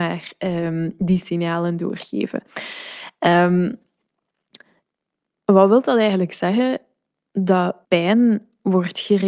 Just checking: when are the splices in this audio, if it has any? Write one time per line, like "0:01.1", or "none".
0:07.8